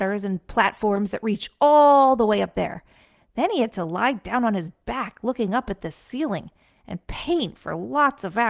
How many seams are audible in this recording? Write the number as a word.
zero